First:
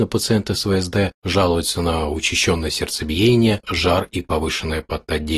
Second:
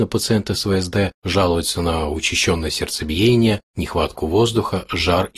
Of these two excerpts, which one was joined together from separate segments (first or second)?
first